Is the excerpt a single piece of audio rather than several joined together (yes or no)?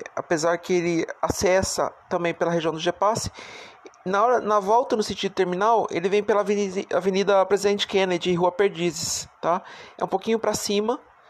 no